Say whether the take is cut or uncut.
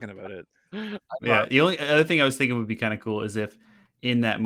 uncut